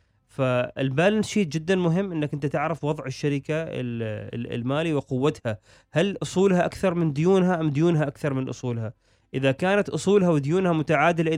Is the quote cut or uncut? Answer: uncut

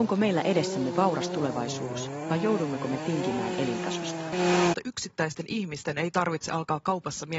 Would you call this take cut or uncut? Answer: uncut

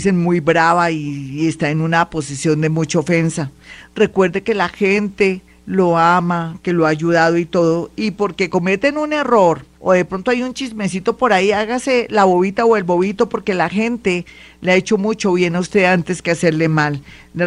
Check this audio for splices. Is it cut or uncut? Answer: cut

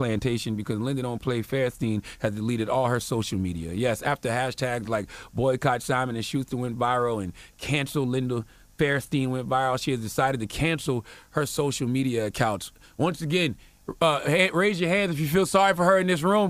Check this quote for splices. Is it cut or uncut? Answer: uncut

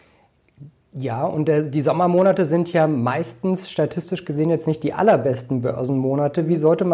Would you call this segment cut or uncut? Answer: uncut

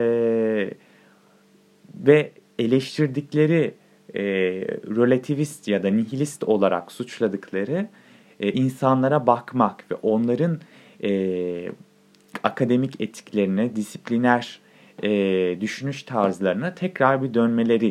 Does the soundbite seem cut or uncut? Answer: uncut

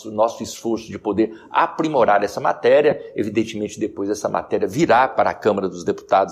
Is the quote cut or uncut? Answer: uncut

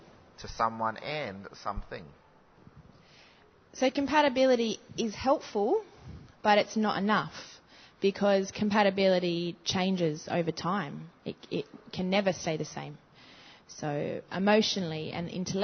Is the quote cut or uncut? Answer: uncut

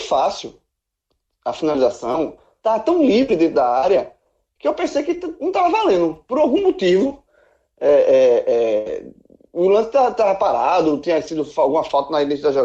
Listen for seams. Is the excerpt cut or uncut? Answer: uncut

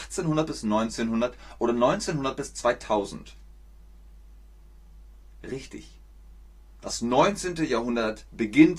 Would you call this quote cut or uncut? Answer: uncut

